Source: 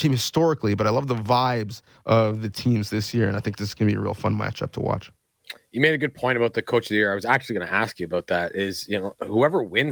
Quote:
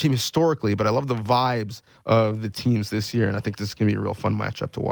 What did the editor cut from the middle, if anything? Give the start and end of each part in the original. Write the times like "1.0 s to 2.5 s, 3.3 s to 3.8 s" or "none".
none